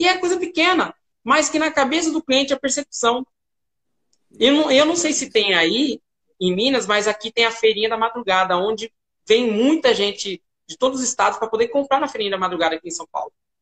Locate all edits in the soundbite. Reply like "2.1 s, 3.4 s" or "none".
none